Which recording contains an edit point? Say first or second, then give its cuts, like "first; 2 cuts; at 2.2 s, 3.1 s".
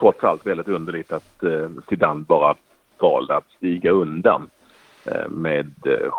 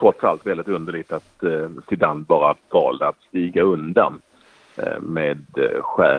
second; 1 cut; at 2.6 s